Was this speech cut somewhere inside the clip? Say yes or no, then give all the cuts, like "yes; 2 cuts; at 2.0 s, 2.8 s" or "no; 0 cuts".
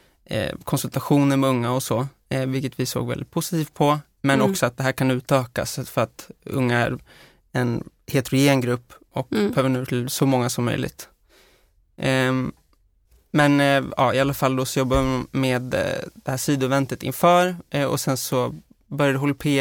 no; 0 cuts